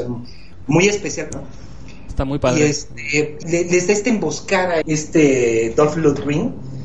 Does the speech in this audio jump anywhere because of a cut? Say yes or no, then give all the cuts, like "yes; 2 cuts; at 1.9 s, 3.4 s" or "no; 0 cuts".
yes; 3 cuts; at 1.3 s, 3.4 s, 4.8 s